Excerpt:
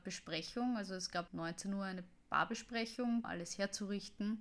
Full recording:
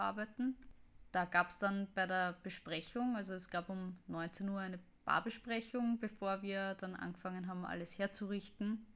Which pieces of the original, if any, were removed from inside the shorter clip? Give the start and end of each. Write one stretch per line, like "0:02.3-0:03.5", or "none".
0:03.7-0:04.0
0:06.0-0:07.6